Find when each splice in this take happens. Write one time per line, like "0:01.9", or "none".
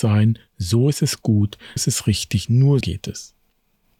0:01.8
0:02.8